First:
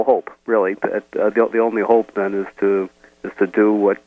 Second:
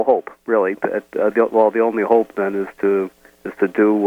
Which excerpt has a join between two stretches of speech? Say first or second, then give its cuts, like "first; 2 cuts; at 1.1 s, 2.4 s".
first; 1 cut; at 1.5 s